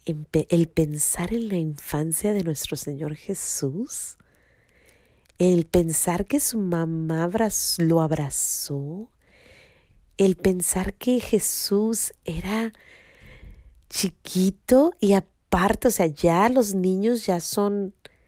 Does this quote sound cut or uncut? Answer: uncut